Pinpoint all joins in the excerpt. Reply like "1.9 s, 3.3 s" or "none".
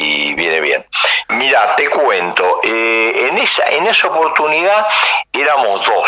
1.3 s

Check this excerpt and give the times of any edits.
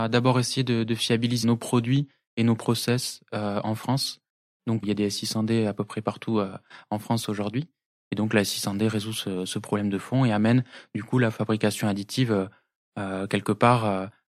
1.4 s, 4.8 s, 8.0 s

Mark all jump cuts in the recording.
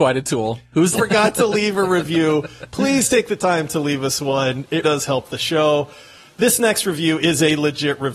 0.9 s, 4.8 s

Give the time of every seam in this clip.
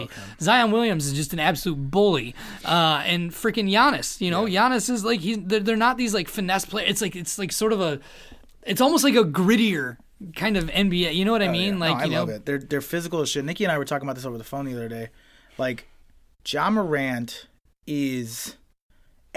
none

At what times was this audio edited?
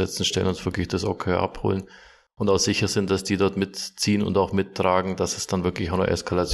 none

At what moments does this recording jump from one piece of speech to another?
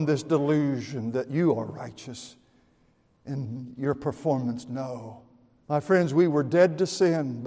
5.6 s

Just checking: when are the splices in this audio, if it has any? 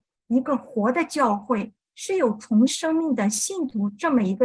2.7 s

